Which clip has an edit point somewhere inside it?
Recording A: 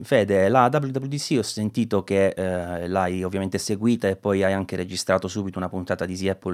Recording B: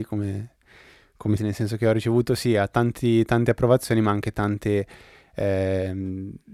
B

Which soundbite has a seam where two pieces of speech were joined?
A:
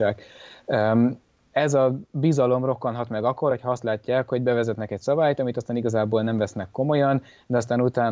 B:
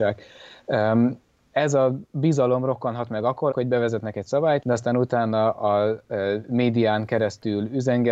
B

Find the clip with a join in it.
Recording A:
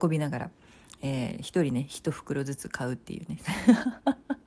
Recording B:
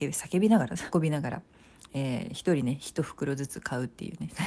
B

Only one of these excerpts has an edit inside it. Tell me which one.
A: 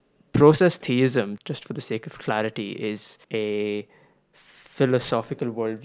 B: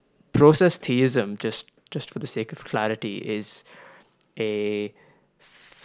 A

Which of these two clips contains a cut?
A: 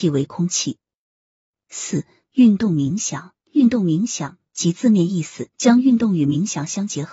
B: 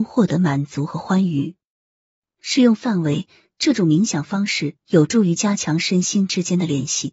A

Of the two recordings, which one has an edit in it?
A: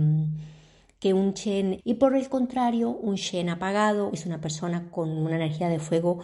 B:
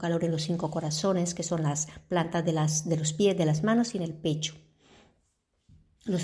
A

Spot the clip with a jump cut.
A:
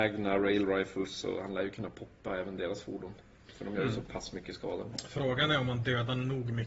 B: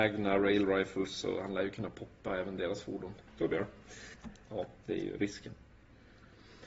B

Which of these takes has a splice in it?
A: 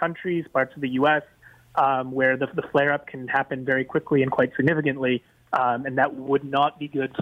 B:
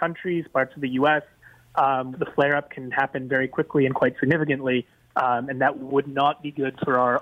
B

